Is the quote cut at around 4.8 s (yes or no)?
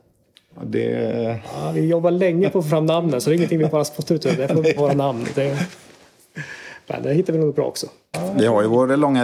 yes